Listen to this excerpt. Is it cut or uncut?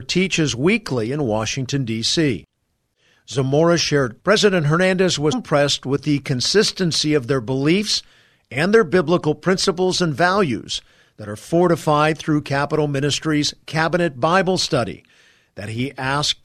cut